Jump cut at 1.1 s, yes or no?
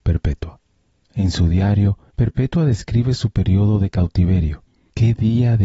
yes